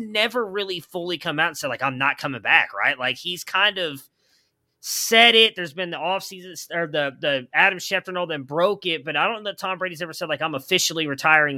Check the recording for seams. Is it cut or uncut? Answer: uncut